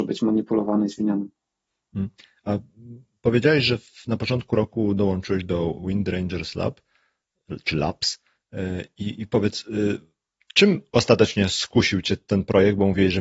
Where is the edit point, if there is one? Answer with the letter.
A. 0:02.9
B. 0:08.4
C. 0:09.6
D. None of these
D